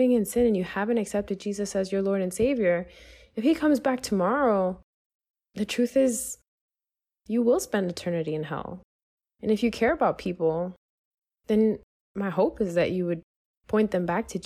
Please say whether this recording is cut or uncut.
uncut